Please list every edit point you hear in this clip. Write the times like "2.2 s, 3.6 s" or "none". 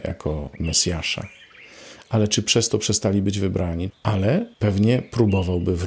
3.9 s

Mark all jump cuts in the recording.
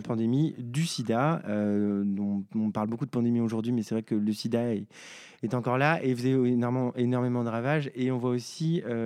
none

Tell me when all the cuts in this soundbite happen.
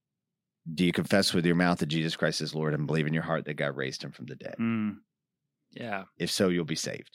none

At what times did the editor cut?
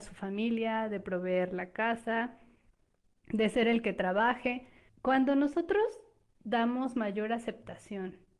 4.9 s

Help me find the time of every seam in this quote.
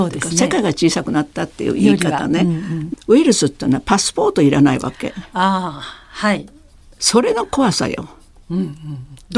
2.9 s

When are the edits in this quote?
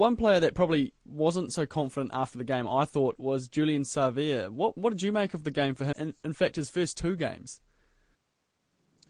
5.9 s

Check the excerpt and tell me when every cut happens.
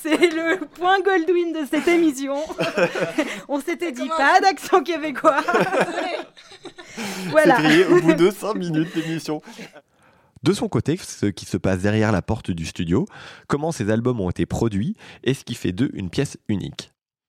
11.0 s

